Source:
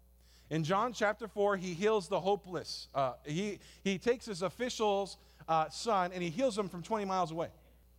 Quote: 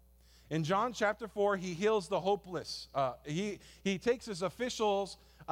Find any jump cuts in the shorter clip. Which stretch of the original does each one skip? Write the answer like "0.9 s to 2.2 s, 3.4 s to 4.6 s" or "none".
none